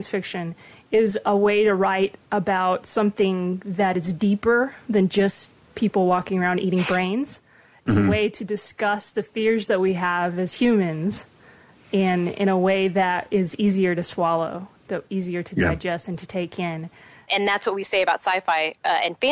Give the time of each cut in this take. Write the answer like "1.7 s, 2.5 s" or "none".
none